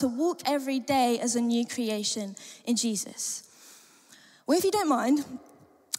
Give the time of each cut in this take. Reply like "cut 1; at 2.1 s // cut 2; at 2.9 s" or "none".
none